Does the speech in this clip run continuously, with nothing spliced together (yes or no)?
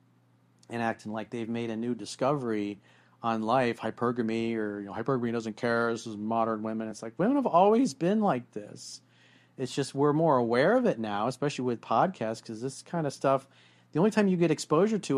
yes